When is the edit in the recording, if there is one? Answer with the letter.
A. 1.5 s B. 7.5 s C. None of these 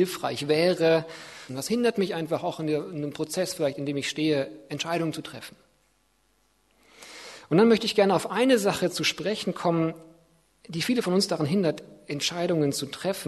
A